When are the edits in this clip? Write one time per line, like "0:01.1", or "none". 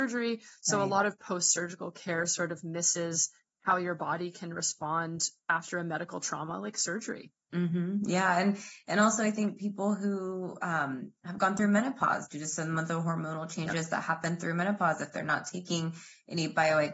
none